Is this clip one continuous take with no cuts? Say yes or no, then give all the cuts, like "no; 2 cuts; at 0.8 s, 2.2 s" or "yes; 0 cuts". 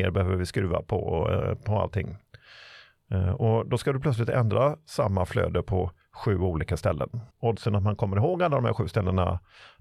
no; 1 cut; at 7.3 s